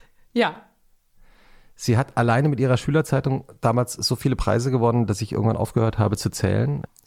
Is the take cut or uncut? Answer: uncut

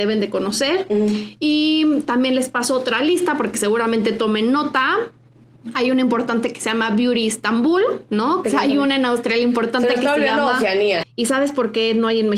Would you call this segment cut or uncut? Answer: cut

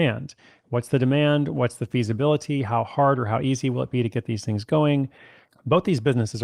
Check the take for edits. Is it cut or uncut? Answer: uncut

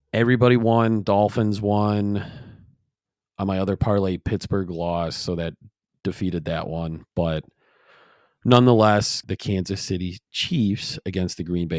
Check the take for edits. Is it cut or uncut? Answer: cut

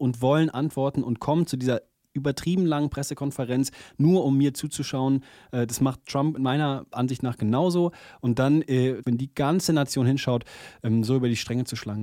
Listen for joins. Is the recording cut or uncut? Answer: cut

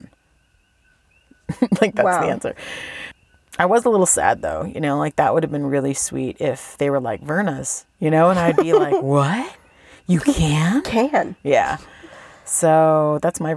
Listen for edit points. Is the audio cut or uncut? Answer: uncut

